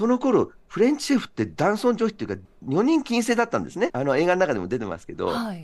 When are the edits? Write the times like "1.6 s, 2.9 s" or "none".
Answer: 2.4 s, 3.9 s